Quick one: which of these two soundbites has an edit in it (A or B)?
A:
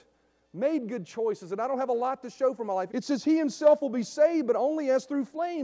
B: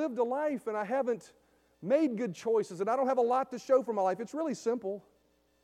A